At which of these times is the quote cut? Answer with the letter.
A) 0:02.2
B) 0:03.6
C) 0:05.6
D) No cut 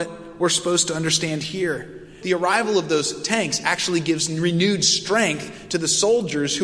A